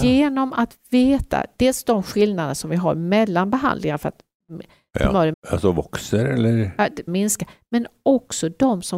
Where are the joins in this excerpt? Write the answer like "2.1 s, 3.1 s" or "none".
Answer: 5.3 s, 7.1 s